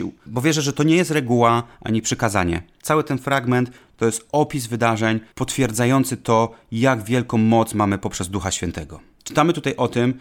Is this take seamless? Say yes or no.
no